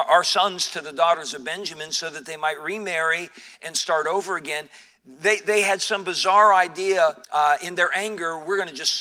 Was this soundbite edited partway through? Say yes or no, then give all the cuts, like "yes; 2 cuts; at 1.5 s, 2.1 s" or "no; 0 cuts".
yes; 1 cut; at 7.2 s